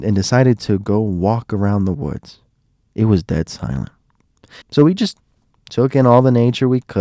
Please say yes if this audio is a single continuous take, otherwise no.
no